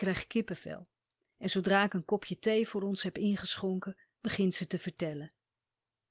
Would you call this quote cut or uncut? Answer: uncut